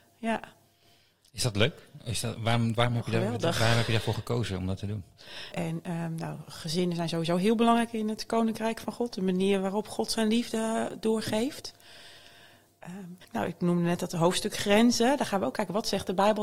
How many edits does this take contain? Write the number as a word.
one